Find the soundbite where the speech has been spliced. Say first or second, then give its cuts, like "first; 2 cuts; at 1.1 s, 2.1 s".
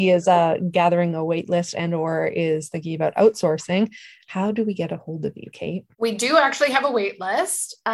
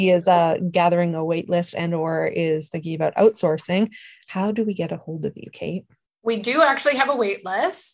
first; 1 cut; at 5.9 s